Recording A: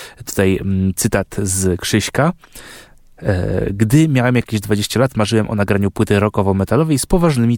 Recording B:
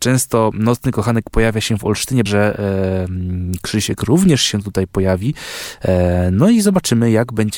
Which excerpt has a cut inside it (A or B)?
B